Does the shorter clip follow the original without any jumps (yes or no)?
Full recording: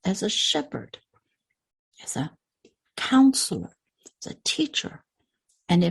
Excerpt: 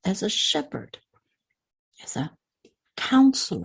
yes